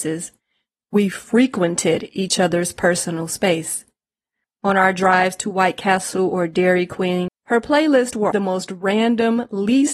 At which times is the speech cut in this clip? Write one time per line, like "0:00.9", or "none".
0:04.4
0:07.3
0:08.3